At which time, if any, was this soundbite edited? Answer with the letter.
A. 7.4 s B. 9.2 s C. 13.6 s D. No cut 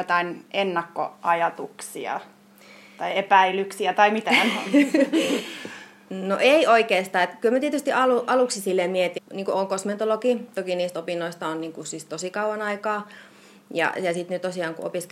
B